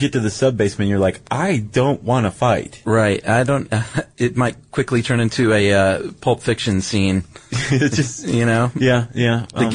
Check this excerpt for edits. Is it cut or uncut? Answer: uncut